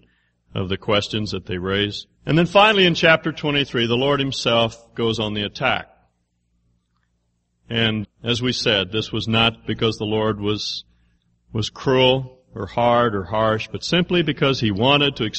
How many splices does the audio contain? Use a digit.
2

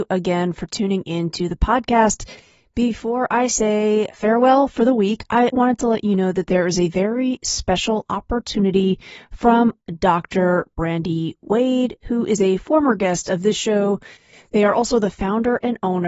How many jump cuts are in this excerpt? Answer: 1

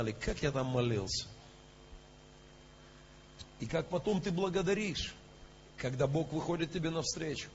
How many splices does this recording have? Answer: 2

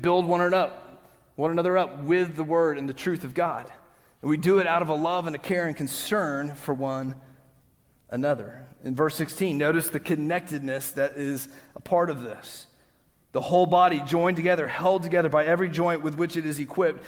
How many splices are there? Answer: 0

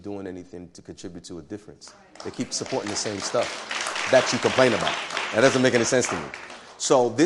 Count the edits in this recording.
0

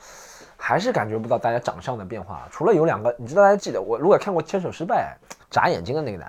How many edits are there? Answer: 2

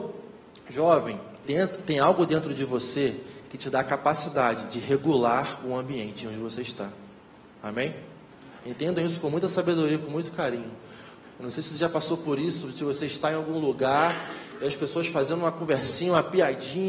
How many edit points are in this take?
2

